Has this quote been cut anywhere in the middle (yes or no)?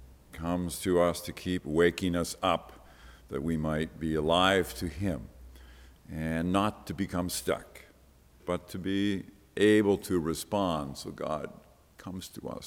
yes